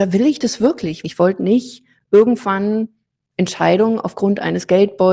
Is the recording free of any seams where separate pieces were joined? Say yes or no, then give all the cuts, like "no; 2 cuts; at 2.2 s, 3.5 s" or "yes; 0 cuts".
no; 1 cut; at 1.0 s